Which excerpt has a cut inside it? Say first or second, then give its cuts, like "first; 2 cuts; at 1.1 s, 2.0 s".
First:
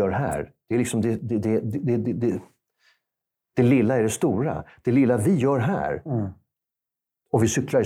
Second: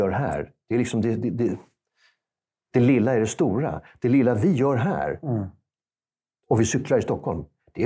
second; 1 cut; at 1.2 s